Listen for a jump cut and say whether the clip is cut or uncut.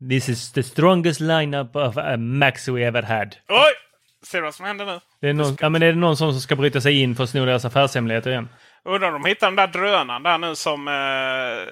cut